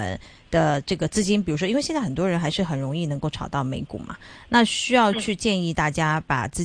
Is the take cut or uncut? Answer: uncut